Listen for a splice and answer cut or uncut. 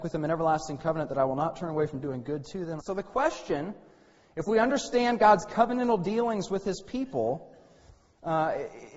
cut